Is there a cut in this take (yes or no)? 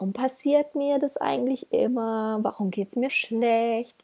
yes